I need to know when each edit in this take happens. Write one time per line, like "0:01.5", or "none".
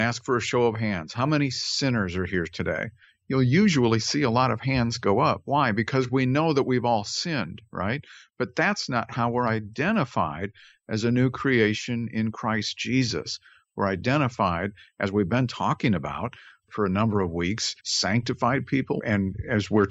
0:17.8
0:19.0